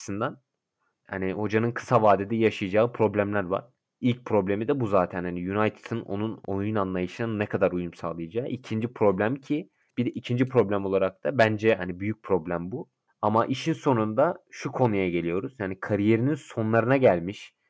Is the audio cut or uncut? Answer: cut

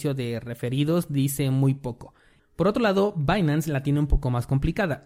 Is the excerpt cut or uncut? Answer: cut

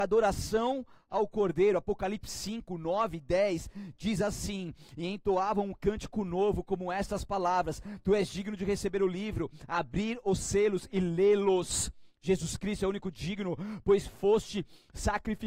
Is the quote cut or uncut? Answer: uncut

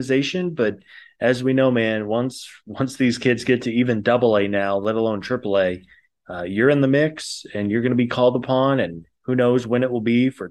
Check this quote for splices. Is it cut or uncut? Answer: uncut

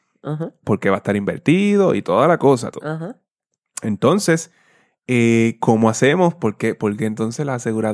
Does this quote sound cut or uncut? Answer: cut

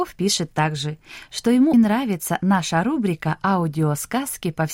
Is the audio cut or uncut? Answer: cut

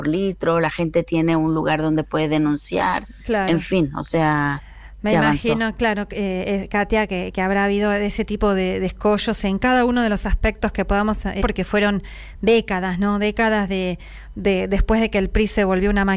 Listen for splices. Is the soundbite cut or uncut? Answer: cut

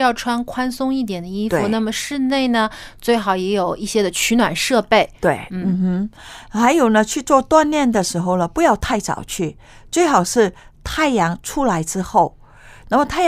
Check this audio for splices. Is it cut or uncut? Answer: uncut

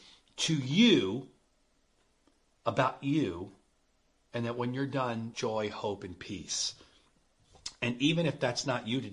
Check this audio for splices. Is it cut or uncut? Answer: cut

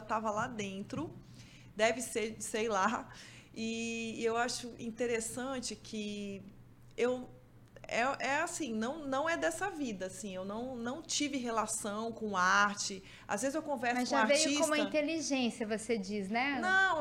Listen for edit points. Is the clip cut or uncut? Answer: uncut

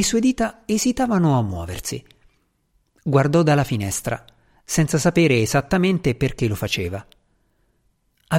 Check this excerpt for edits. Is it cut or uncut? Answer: uncut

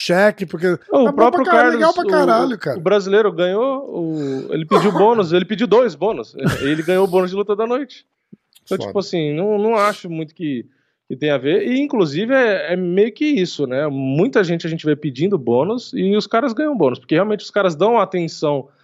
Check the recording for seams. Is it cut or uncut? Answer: uncut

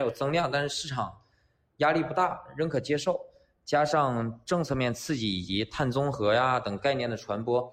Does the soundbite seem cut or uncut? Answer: uncut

